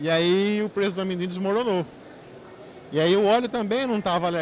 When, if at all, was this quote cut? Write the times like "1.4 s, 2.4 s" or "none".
none